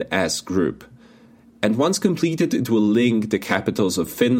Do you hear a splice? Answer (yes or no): no